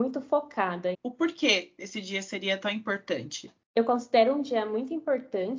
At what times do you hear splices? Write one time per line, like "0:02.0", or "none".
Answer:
0:00.9

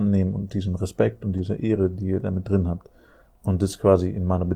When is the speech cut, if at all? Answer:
none

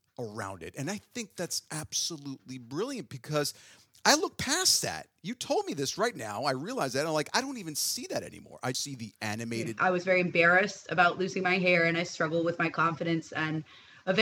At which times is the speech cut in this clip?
0:08.7
0:09.8

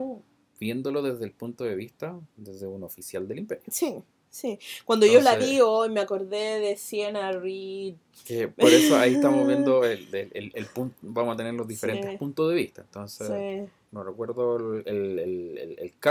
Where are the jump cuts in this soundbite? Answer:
0:13.9

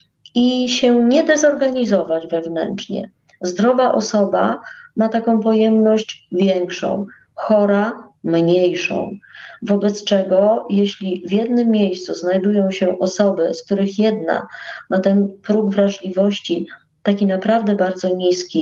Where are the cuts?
none

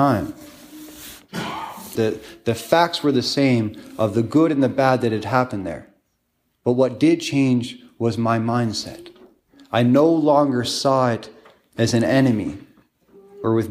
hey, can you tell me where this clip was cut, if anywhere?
0:02.0

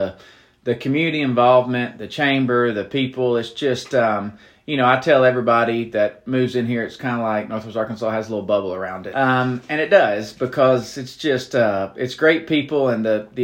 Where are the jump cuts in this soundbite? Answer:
0:09.1

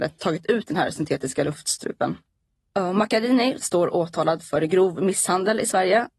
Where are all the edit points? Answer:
0:03.6

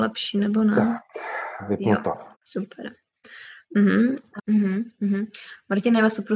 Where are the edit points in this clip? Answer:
0:02.3
0:04.4

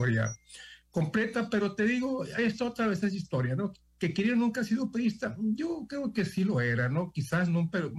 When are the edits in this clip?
none

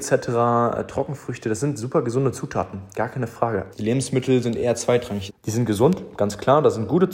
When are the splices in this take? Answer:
0:03.7
0:05.3

